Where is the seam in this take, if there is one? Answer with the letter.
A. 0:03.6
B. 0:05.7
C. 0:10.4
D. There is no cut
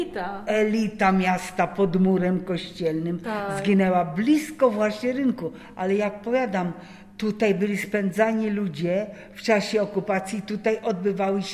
D